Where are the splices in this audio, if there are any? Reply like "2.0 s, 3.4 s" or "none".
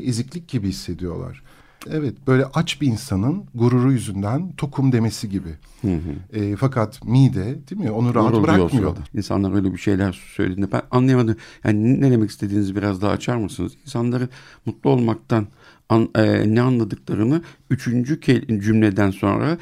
1.9 s, 9.1 s